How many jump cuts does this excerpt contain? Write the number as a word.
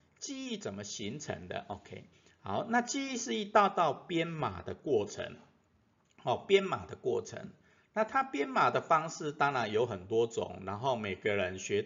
zero